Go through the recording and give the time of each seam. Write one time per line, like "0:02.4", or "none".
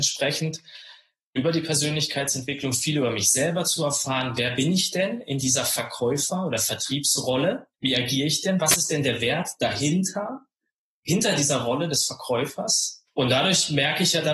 0:01.4
0:07.7
0:13.1